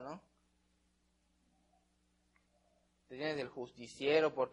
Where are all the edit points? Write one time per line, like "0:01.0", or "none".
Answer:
0:02.9